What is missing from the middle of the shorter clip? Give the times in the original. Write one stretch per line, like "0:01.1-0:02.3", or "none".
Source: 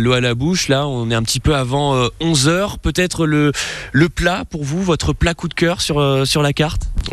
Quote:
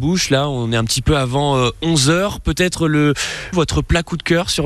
0:03.9-0:04.8